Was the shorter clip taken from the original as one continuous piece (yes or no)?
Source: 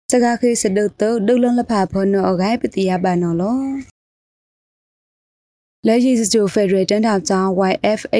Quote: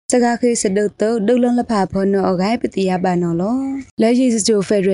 no